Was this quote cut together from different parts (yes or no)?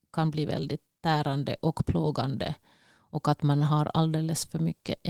no